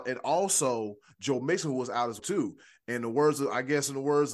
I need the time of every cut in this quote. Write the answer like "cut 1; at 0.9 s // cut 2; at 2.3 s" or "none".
cut 1; at 2.2 s